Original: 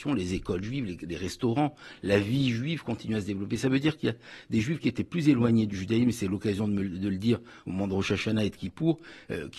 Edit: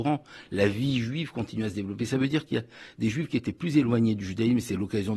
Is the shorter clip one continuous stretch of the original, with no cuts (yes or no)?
yes